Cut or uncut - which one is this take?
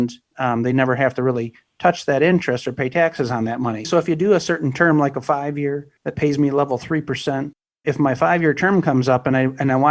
cut